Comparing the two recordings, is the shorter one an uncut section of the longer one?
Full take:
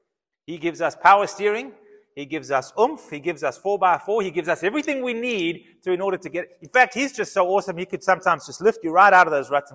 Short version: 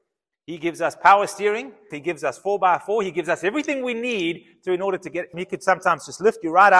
no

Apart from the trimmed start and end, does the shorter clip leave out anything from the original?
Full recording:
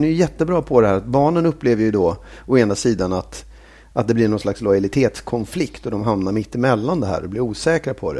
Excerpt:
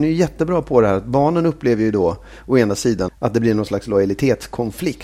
yes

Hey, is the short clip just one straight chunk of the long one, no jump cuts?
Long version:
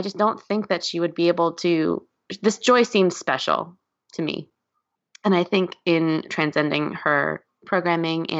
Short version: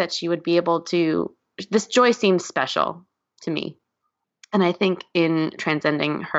yes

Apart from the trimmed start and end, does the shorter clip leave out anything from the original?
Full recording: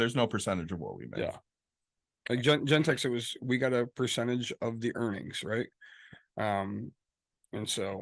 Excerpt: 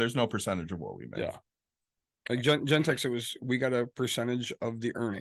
no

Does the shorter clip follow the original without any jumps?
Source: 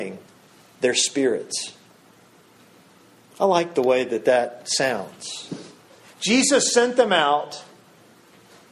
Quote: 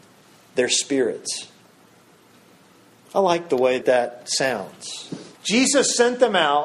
no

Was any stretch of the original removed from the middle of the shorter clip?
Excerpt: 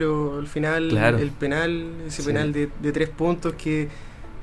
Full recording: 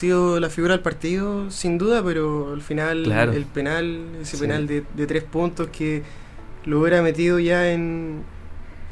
no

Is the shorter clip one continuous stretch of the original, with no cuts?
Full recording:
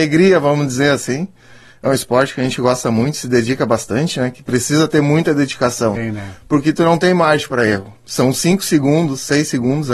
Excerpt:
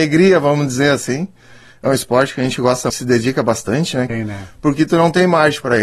no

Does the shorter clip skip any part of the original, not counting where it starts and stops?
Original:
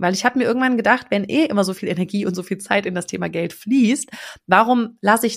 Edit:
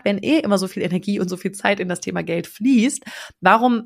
no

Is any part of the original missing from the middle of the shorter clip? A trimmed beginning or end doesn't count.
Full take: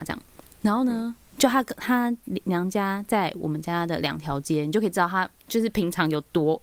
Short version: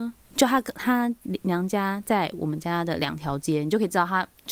no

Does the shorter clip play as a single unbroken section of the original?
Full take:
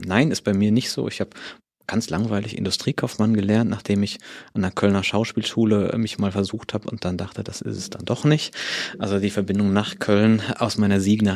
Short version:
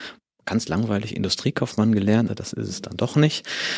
no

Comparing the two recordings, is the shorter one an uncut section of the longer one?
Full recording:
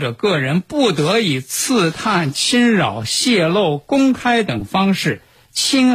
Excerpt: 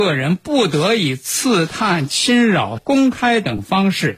no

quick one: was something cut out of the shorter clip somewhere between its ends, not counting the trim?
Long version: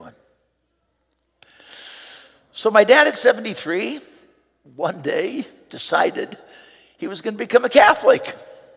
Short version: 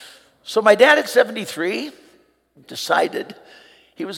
yes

